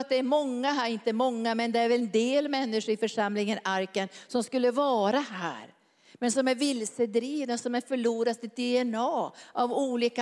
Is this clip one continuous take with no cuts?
yes; 0 cuts

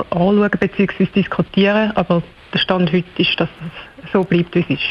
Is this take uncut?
yes; 0 cuts

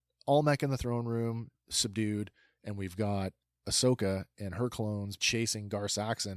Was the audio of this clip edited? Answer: yes; 2 cuts; at 1.5 s, 5.2 s

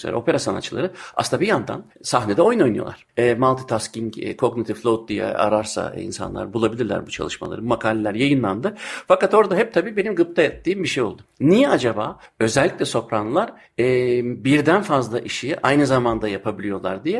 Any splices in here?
yes; 1 cut; at 3.1 s

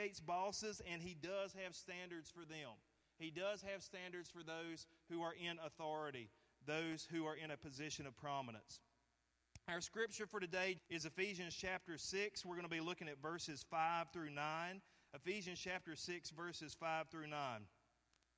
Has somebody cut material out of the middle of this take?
yes; 1 cut; at 10.8 s

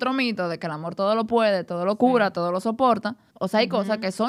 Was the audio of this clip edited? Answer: yes; 1 cut; at 3.3 s

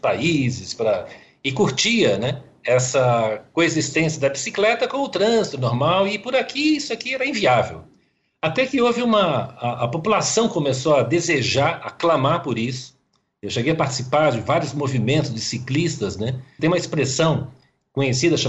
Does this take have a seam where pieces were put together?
yes; 1 cut; at 16.6 s

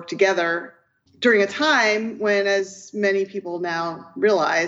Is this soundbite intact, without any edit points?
no; 1 cut; at 1.1 s

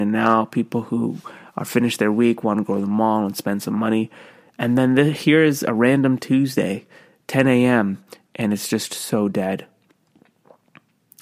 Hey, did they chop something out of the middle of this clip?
no; 0 cuts

